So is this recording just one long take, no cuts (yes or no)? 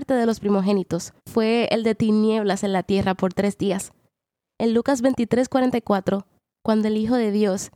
no